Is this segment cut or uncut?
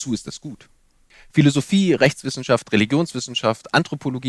cut